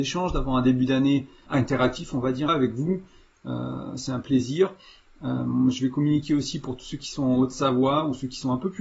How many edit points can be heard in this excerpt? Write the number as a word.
two